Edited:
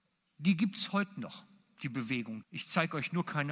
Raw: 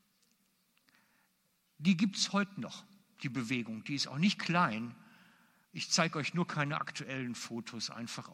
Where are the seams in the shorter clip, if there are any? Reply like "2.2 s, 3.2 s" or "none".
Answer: 2.4 s